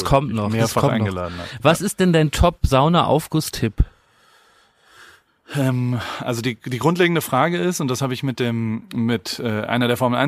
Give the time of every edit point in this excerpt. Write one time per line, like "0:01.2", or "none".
none